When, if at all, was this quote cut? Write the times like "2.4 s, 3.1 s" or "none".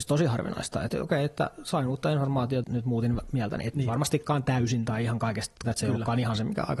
2.6 s, 5.6 s